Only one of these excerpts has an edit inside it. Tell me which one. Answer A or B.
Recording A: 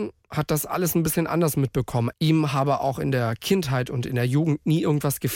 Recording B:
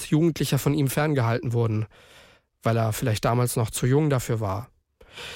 A